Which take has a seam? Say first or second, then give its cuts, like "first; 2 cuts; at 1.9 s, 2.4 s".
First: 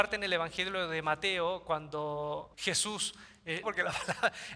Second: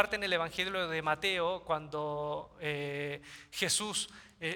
first; 2 cuts; at 2.5 s, 3.6 s